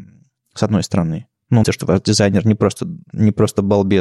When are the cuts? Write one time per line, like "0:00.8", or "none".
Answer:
0:01.6